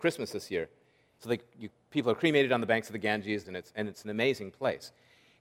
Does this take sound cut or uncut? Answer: cut